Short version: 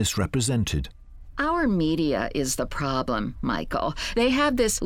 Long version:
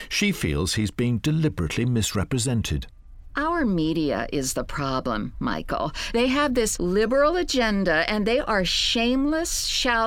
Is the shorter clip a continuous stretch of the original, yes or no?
yes